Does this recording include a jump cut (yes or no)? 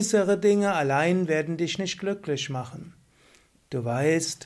no